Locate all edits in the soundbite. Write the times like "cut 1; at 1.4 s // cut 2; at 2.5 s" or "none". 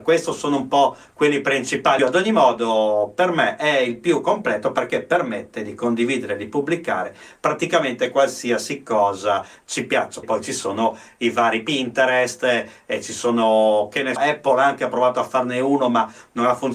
cut 1; at 2.0 s // cut 2; at 10.2 s // cut 3; at 14.2 s